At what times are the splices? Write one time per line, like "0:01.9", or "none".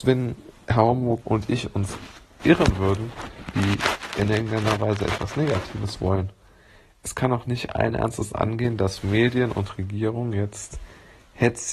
0:01.2
0:03.5